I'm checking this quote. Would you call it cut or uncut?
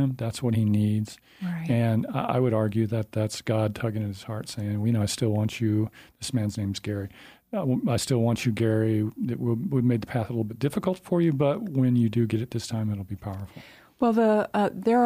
uncut